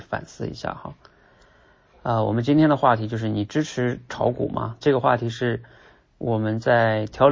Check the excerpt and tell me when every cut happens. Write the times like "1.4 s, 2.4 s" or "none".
4.8 s